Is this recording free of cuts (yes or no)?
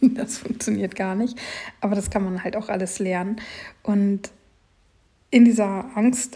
yes